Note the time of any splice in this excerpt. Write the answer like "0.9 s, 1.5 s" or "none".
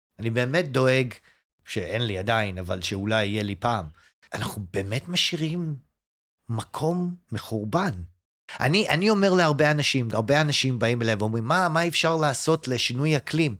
1.5 s